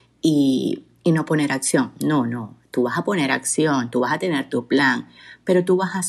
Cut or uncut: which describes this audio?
uncut